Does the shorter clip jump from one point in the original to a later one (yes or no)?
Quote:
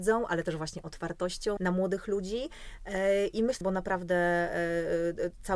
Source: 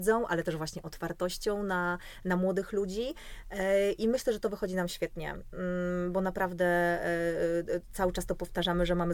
yes